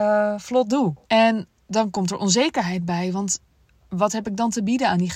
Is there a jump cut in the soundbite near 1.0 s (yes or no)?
yes